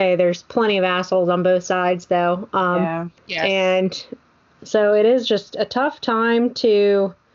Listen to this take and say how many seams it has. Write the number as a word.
one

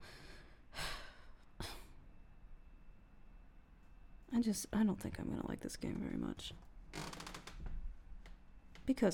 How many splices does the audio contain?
one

